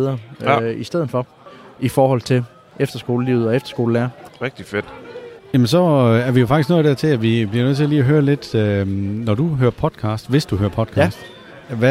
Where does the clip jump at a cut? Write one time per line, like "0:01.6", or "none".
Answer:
0:04.3

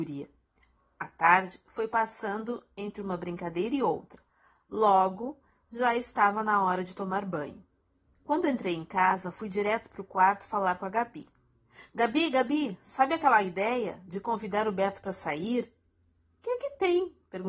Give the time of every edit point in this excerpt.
none

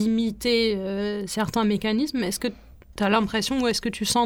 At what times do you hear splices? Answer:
none

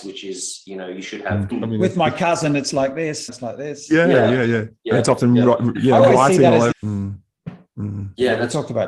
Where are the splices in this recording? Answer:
0:01.5
0:03.3
0:06.7

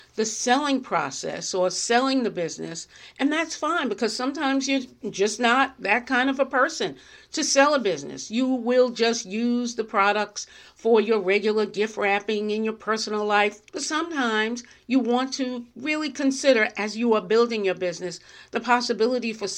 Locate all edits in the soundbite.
0:13.7

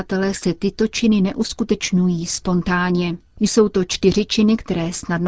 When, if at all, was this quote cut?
0:03.3

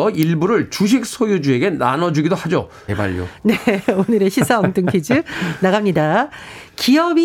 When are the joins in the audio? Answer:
0:02.9

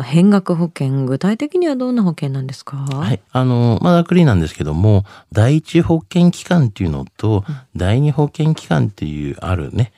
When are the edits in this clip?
0:03.3

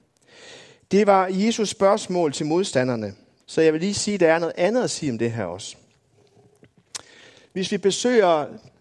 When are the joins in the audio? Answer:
0:03.4

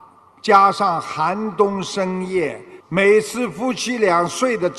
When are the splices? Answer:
0:02.8

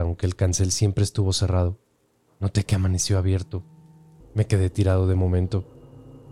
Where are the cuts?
0:04.2

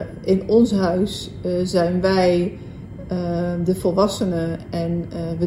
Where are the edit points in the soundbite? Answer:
none

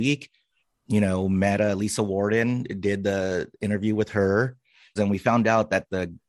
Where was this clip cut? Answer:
0:05.0

